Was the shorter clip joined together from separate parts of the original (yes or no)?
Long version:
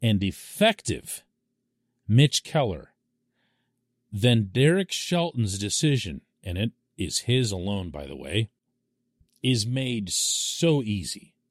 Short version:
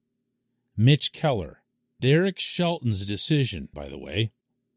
yes